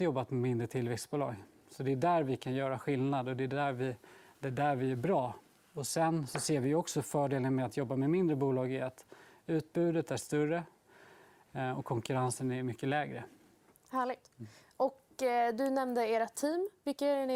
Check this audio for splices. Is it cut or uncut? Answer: cut